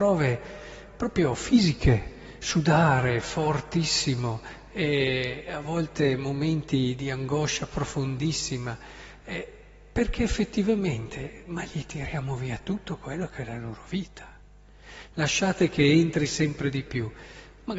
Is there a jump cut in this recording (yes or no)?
yes